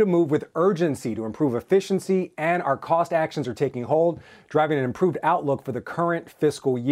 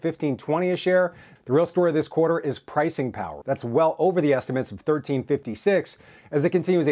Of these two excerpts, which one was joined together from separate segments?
second; 2 cuts; at 1.4 s, 3.4 s

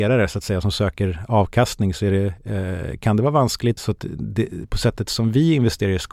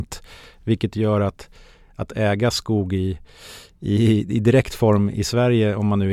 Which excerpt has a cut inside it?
first; 1 cut; at 3.8 s

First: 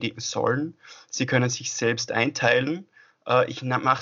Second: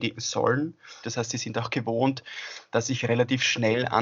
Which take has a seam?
second; 1 cut; at 1.0 s

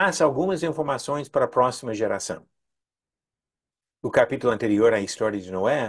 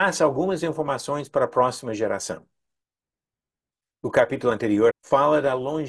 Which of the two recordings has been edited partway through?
second; 1 cut; at 4.9 s

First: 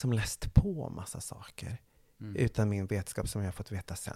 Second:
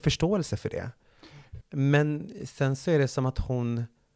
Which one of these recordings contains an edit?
second; 1 cut; at 1.6 s

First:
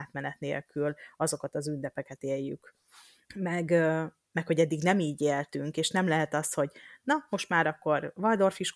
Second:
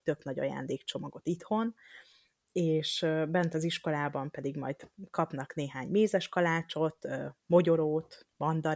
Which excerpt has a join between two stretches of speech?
first; 1 cut; at 3.3 s

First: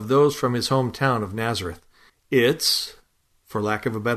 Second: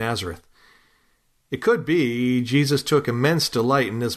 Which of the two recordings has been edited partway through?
first; 1 cut; at 2.1 s

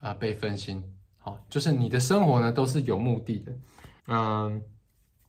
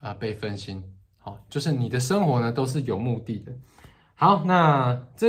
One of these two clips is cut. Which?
first; 1 cut; at 4.0 s

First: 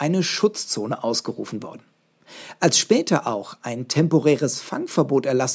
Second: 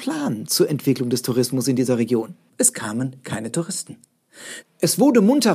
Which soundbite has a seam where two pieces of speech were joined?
second; 2 cuts; at 2.5 s, 4.6 s

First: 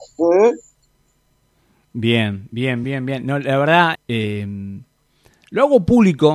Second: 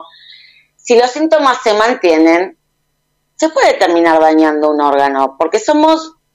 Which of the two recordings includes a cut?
first; 2 cuts; at 2.8 s, 3.9 s

